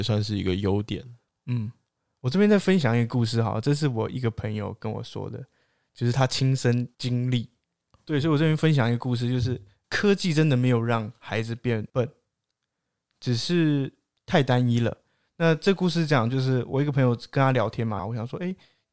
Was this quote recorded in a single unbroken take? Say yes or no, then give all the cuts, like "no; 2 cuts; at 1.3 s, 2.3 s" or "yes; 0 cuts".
no; 2 cuts; at 7.9 s, 18.0 s